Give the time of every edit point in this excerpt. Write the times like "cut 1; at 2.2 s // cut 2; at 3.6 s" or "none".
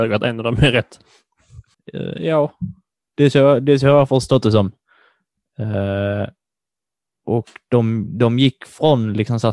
cut 1; at 1.7 s